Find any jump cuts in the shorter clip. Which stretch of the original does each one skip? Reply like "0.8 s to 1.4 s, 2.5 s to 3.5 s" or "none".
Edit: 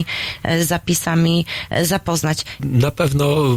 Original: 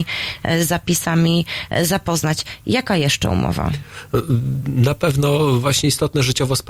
2.6 s to 4.6 s